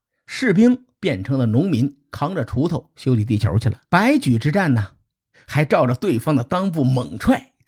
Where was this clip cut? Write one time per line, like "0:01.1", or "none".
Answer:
0:03.9
0:05.3